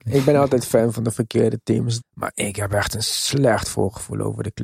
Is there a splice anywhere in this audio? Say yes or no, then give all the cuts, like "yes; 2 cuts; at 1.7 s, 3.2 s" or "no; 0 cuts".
yes; 1 cut; at 2.0 s